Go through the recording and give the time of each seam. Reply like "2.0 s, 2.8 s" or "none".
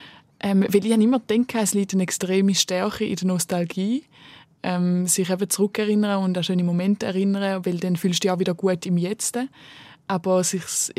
none